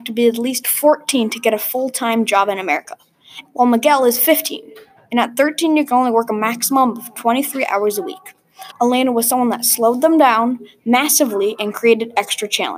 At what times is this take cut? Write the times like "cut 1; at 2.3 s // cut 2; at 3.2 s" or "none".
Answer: cut 1; at 3.4 s // cut 2; at 8.7 s